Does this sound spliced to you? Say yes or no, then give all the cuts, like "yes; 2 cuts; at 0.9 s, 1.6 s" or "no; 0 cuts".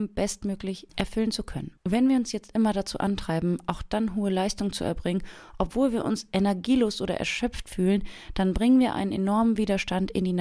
yes; 1 cut; at 1.8 s